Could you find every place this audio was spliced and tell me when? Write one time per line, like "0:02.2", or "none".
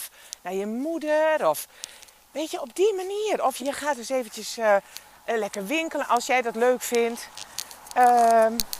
0:03.6